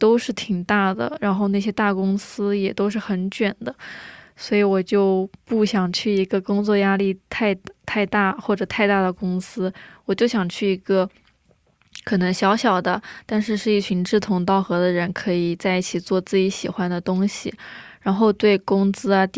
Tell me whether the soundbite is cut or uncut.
uncut